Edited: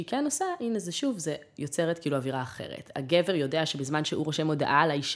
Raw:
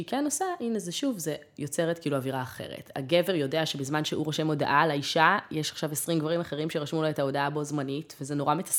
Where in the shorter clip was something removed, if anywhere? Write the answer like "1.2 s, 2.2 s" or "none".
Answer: none